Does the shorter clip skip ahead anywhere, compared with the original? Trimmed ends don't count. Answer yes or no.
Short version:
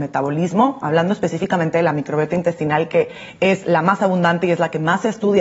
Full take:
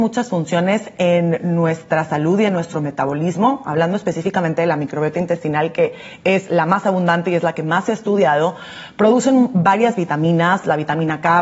no